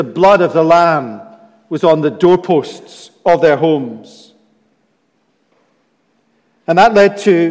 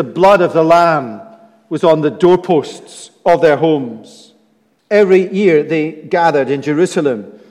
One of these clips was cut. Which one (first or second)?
second